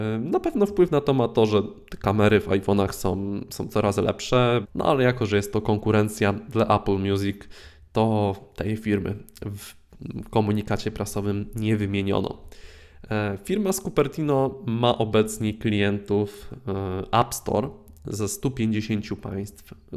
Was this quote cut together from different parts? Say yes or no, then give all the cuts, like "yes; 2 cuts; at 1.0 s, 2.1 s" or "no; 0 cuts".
yes; 1 cut; at 4.6 s